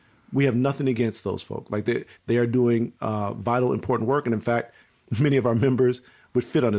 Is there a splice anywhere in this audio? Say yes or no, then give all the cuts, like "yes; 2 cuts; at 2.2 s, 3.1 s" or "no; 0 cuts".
no; 0 cuts